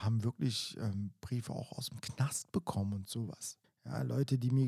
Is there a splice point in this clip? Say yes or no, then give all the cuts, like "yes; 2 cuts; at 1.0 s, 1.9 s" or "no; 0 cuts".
yes; 1 cut; at 3.6 s